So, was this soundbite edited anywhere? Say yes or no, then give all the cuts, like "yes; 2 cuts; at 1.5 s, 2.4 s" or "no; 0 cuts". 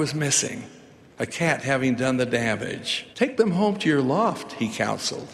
yes; 1 cut; at 3.1 s